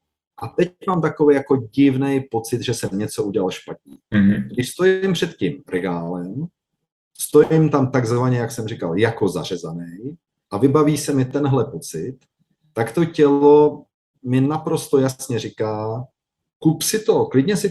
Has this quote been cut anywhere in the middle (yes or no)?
no